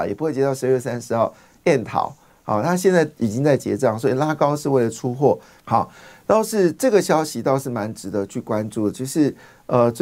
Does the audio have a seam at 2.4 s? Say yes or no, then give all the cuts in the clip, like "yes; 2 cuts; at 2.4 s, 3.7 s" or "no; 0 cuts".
no; 1 cut; at 5.6 s